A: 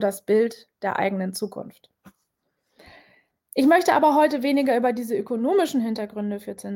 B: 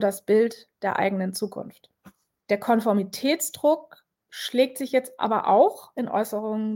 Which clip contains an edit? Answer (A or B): B